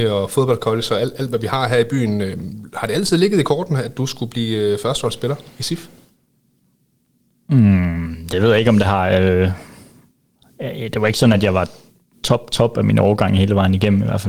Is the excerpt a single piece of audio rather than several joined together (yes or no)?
yes